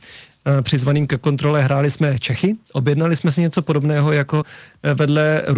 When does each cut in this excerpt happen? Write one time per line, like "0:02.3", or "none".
none